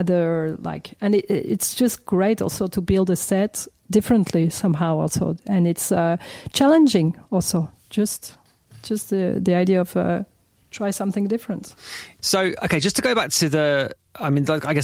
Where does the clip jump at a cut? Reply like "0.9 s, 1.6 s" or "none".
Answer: none